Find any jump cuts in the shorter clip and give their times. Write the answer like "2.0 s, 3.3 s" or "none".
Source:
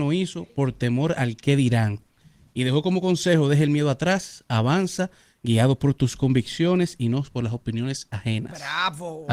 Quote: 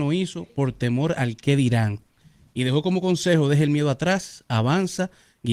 none